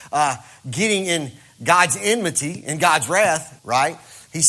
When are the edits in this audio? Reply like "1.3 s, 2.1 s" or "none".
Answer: 3.6 s